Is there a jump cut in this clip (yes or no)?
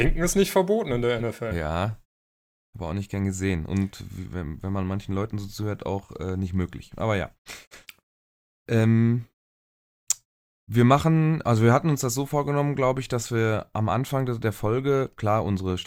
no